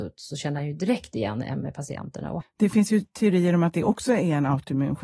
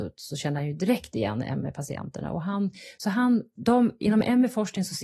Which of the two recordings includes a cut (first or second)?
first